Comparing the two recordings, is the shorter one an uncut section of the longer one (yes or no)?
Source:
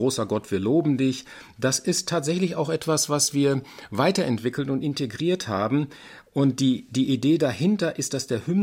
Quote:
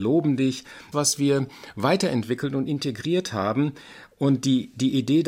no